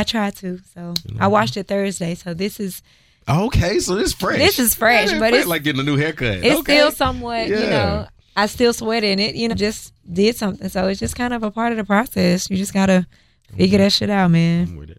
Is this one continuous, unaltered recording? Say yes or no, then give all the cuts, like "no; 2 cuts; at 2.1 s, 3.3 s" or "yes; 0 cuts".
no; 1 cut; at 9.5 s